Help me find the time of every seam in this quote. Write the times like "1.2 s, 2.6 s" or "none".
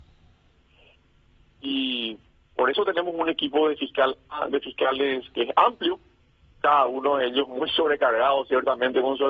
1.6 s